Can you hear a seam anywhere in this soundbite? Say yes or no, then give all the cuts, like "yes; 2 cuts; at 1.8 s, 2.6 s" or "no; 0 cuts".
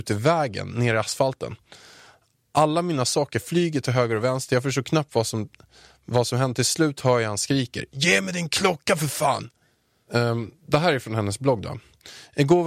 yes; 1 cut; at 10.1 s